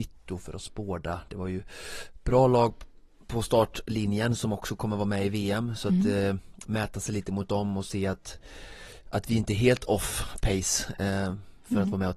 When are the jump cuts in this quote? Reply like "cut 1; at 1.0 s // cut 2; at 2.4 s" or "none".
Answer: none